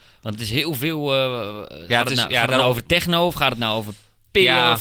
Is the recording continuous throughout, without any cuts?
yes; 0 cuts

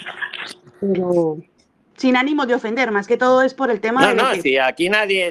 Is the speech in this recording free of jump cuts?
yes; 0 cuts

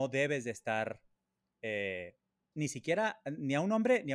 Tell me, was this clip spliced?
yes; 1 cut; at 2.5 s

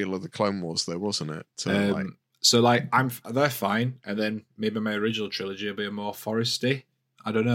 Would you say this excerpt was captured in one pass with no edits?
yes; 0 cuts

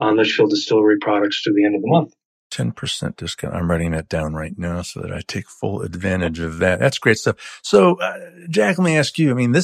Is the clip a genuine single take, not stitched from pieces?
yes; 0 cuts

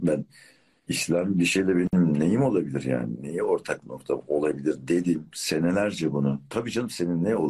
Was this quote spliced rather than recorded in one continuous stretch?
yes; 1 cut; at 6.5 s

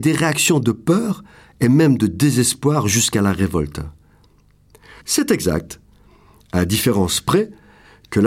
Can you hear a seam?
yes; 1 cut; at 5.0 s

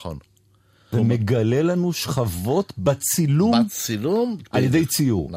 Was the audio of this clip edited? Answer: yes; 1 cut; at 0.9 s

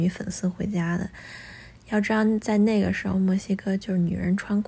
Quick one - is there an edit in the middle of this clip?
no; 0 cuts

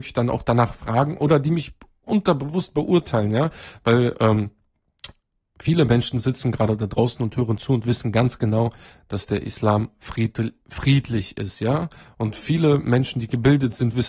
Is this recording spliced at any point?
no; 0 cuts

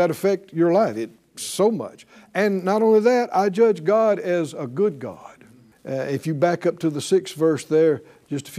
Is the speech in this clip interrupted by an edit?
yes; 1 cut; at 5.7 s

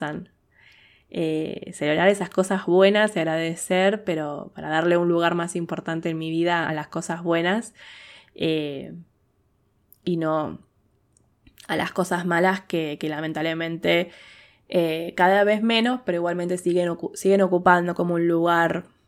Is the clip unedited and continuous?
yes; 0 cuts

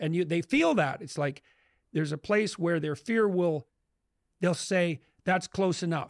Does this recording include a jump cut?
no; 0 cuts

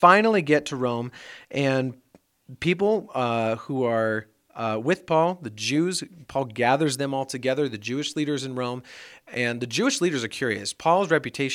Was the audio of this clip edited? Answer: no; 0 cuts

